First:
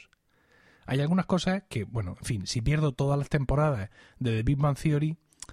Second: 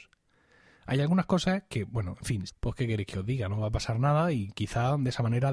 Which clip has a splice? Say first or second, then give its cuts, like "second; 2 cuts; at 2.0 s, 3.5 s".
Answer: second; 1 cut; at 2.5 s